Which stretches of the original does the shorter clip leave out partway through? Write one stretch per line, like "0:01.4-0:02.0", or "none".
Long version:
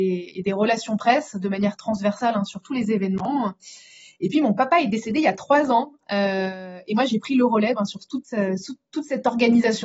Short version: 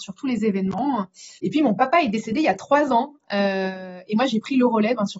0:03.8-0:04.2